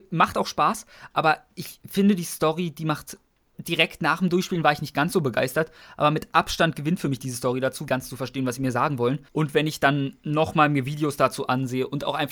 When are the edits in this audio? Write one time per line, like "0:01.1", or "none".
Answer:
0:03.5
0:07.9
0:09.3